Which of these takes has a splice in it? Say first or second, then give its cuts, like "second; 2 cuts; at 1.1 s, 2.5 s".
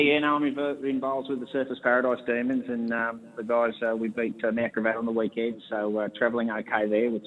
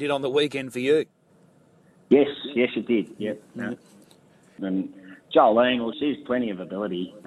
second; 2 cuts; at 4.6 s, 5.9 s